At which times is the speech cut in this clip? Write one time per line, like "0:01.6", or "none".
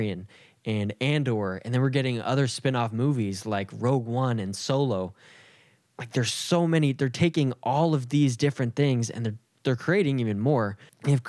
none